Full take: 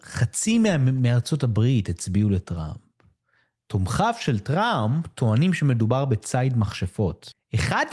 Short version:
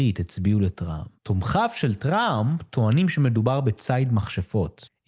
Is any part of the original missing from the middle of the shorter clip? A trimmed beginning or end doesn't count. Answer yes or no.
yes